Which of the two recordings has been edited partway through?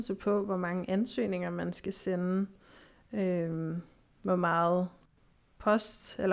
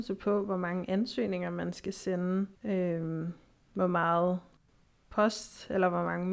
second; 1 cut; at 2.6 s

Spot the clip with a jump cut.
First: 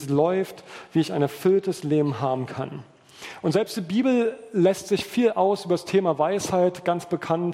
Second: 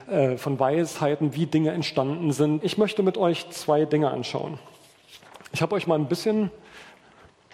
second; 1 cut; at 2.6 s

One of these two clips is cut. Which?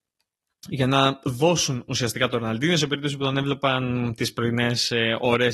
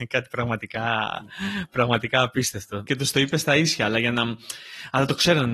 second; 1 cut; at 2.9 s

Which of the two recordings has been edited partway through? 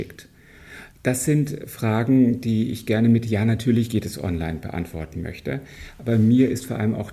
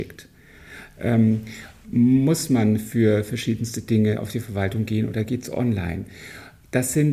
first; 1 cut; at 0.9 s

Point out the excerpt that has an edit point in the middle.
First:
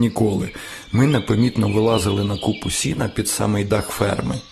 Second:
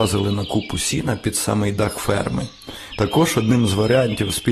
second; 1 cut; at 2.9 s

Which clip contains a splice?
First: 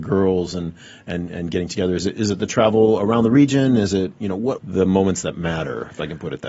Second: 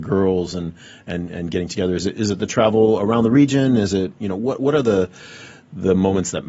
first; 1 cut; at 4.6 s

